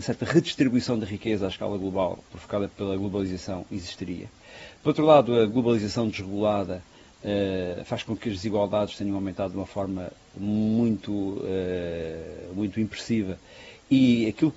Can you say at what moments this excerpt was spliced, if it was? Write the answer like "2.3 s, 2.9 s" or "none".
none